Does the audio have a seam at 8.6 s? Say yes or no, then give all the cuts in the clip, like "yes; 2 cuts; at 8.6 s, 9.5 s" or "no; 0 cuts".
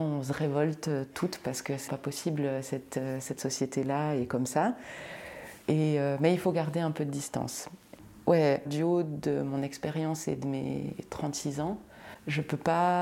yes; 3 cuts; at 1.9 s, 5.6 s, 8.6 s